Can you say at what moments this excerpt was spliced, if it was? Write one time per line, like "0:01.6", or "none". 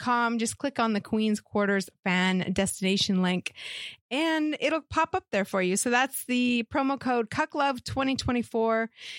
none